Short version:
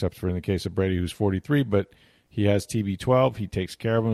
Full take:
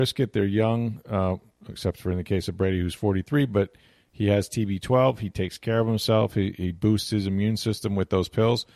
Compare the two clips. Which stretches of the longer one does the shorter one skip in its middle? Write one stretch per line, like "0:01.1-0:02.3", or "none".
none